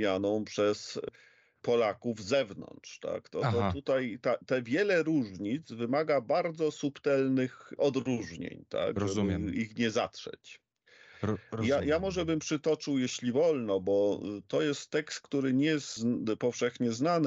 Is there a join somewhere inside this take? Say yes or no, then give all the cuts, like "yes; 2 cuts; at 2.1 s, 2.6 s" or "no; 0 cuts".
no; 0 cuts